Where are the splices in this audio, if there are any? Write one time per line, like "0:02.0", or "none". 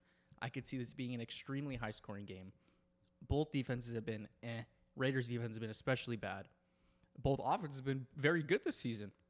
none